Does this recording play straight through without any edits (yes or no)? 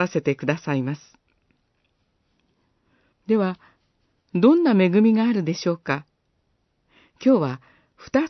no